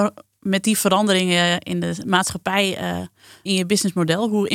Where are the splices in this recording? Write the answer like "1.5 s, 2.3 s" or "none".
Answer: 3.5 s